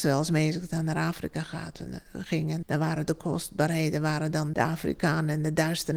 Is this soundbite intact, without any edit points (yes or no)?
no